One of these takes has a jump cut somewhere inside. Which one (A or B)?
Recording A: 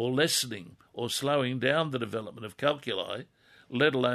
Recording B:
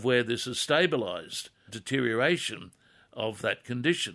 B